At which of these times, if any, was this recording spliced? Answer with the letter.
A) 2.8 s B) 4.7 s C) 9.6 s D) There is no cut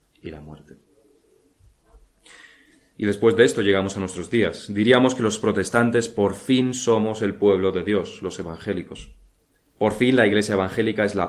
C